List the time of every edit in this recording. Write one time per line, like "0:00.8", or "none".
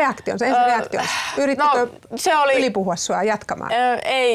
none